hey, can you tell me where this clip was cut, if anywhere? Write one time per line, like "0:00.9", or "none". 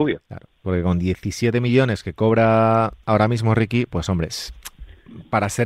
none